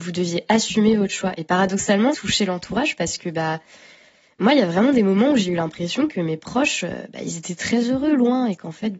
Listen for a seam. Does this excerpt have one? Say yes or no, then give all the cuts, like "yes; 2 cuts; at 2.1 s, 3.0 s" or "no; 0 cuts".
yes; 1 cut; at 2.1 s